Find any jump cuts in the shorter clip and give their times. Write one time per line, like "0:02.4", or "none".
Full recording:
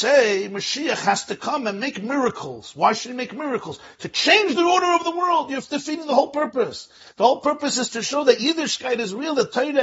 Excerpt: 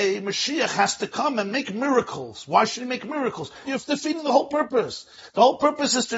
0:03.6